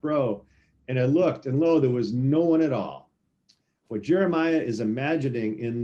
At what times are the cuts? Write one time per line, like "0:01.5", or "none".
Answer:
0:03.9